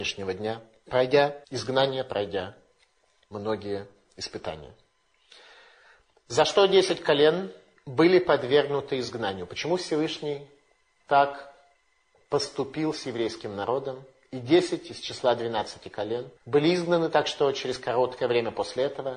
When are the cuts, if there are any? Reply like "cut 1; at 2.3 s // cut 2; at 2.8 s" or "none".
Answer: cut 1; at 1.4 s // cut 2; at 16.4 s